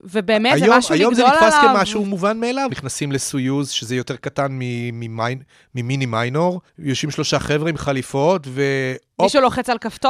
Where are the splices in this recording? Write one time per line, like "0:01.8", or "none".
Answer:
0:02.7
0:06.7